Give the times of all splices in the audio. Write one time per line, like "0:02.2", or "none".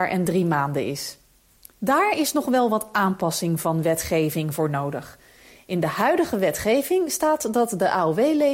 0:01.6